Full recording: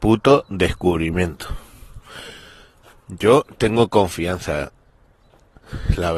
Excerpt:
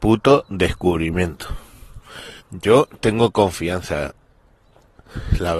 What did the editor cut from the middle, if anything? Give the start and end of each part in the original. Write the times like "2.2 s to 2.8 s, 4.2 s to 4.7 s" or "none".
2.4 s to 3.0 s